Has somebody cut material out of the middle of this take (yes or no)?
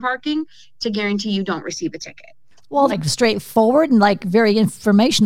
yes